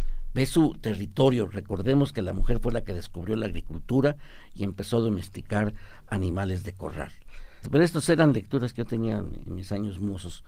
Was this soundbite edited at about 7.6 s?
yes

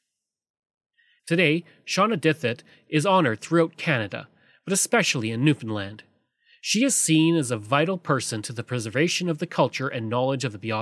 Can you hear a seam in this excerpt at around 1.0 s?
no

